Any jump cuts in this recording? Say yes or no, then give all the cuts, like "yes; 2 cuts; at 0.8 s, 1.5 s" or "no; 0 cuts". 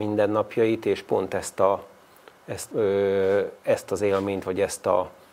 yes; 1 cut; at 2.7 s